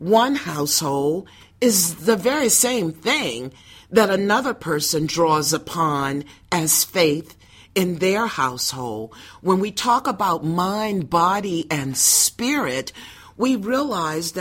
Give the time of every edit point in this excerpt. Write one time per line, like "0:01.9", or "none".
none